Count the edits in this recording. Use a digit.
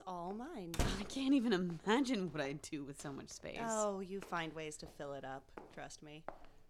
0